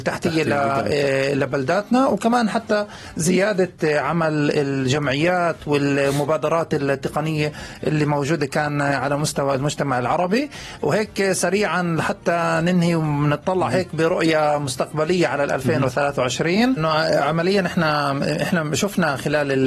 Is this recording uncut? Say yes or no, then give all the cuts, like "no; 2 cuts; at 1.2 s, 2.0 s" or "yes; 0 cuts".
no; 1 cut; at 16.8 s